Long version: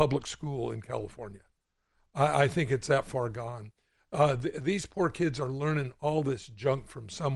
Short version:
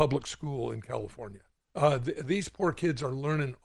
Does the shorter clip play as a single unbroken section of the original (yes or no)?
no